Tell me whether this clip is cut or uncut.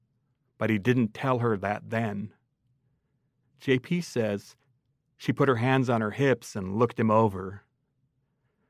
uncut